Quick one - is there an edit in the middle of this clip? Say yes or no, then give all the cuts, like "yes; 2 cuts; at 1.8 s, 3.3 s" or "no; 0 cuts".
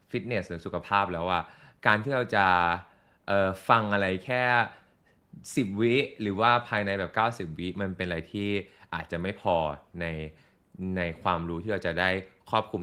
no; 0 cuts